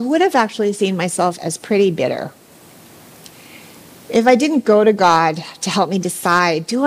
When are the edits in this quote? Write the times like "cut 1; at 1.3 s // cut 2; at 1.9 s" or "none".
none